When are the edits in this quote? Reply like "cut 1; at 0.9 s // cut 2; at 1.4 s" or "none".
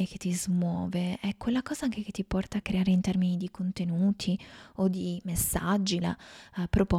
cut 1; at 2.6 s // cut 2; at 6.0 s